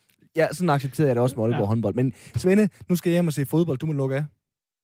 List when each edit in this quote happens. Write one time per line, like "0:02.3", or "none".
none